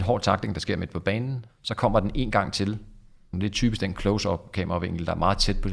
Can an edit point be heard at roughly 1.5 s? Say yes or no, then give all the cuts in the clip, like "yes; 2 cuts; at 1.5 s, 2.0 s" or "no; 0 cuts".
yes; 2 cuts; at 1.5 s, 3.3 s